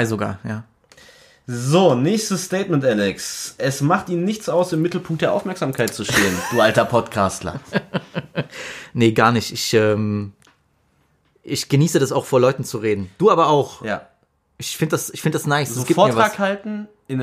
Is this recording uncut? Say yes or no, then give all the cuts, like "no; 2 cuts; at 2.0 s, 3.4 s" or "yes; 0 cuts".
yes; 0 cuts